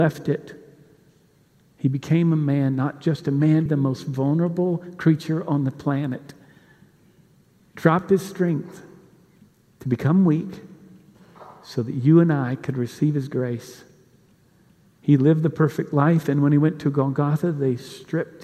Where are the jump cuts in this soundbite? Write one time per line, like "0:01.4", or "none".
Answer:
0:03.7